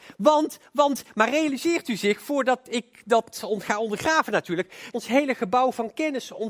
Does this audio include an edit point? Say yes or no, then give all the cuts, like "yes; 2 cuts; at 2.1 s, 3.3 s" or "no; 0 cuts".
yes; 1 cut; at 4.9 s